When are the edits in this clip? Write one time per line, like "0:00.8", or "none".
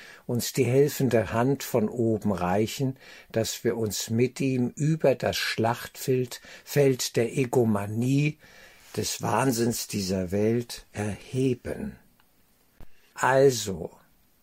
0:13.1